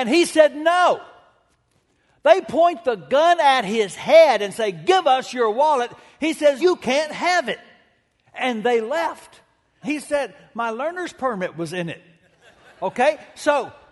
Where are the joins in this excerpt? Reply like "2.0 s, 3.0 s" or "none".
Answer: 6.6 s, 9.8 s